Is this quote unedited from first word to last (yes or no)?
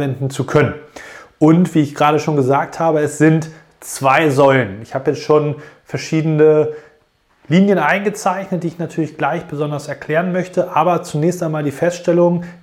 yes